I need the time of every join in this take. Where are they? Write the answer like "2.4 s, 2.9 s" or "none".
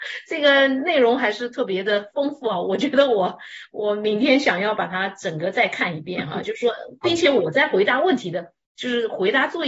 none

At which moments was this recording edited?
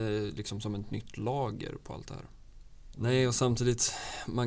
1.8 s, 2.9 s

